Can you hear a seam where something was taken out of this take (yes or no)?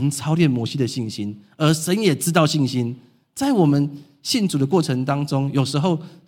no